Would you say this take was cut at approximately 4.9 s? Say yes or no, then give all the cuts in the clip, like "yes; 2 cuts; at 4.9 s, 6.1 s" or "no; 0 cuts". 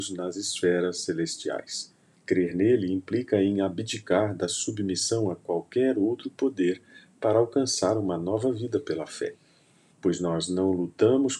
no; 2 cuts; at 2.1 s, 9.9 s